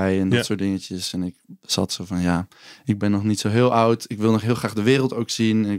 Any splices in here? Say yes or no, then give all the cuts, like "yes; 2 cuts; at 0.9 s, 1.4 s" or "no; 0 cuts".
no; 0 cuts